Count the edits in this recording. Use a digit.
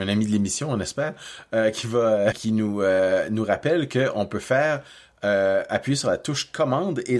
1